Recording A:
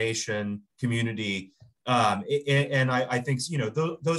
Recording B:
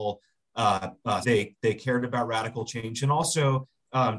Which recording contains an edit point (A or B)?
B